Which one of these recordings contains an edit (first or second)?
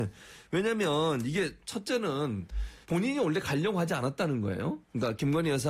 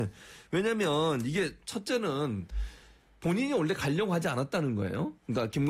first